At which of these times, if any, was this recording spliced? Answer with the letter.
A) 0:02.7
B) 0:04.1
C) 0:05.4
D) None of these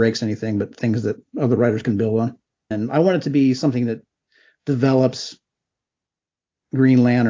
A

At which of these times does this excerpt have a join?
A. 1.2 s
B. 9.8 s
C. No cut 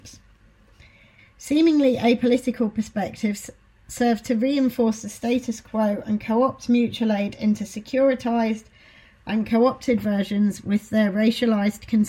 A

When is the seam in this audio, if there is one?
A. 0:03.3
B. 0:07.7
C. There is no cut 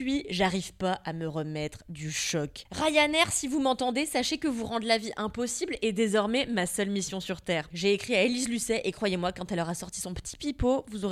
B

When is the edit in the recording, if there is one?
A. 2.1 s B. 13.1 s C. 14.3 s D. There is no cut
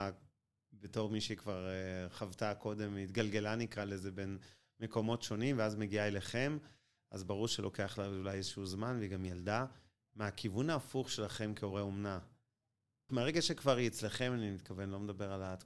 B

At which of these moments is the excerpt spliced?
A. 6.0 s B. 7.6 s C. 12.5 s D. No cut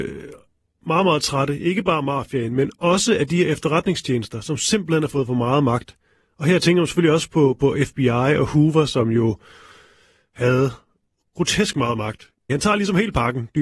C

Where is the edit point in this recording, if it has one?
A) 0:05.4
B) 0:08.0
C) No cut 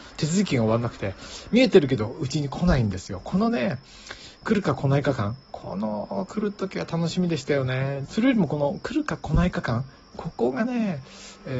B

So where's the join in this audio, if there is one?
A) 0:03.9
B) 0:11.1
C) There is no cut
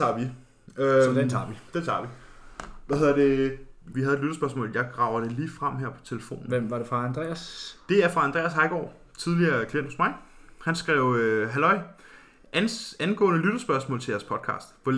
A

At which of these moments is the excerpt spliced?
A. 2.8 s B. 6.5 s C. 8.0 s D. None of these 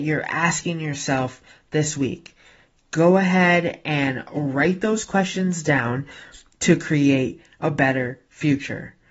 B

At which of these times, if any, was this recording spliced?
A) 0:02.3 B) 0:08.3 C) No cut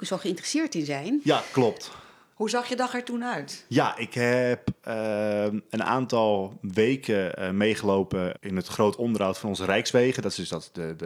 B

